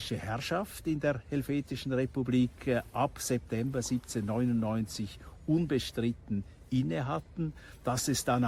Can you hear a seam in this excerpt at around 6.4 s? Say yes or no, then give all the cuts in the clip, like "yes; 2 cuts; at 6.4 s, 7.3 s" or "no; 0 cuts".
no; 0 cuts